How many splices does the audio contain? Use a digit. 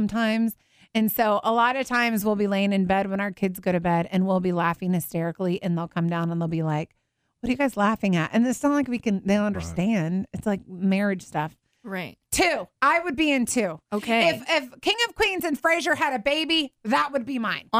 0